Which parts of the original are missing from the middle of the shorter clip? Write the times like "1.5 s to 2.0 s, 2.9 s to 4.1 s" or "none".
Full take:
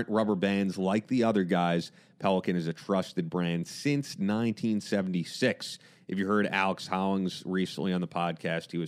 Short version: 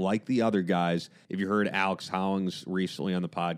2.1 s to 6.0 s

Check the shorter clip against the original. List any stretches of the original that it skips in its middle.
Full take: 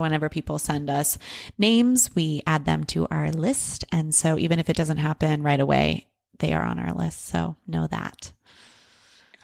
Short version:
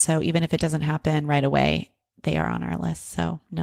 none

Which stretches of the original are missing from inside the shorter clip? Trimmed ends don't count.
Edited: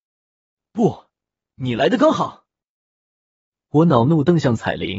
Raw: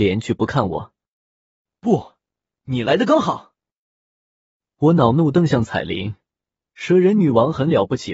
none

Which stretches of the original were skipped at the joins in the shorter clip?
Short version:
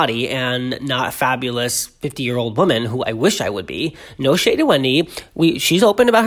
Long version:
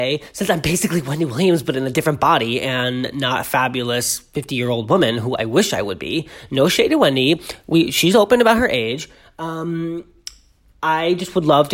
none

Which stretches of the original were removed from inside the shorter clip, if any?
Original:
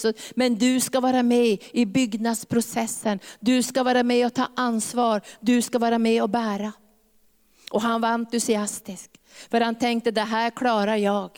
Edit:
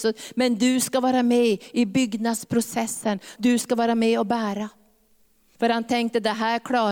3.4 s to 5.4 s, 7.6 s to 9.5 s

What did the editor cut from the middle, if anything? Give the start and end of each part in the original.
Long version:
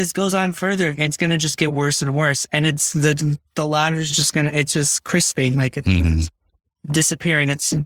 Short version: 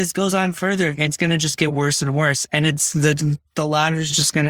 none

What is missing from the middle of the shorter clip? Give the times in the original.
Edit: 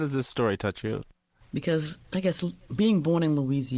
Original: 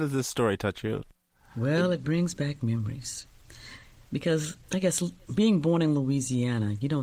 1.4 s to 4.0 s

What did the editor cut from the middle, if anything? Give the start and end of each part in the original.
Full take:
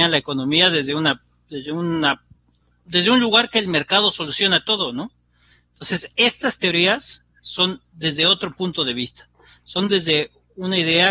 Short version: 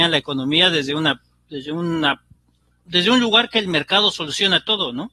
none

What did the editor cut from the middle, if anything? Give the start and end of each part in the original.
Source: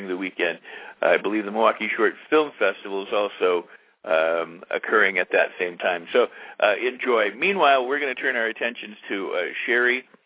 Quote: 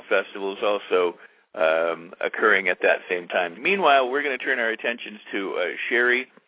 6.1 s to 7.3 s

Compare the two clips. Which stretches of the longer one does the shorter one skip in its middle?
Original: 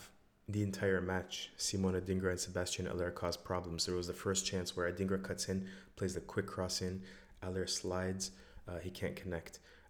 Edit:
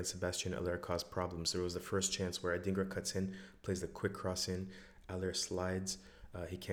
none

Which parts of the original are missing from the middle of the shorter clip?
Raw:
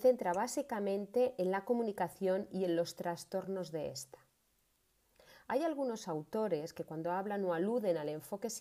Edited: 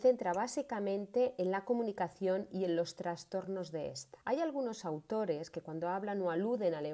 4.2 s to 5.4 s

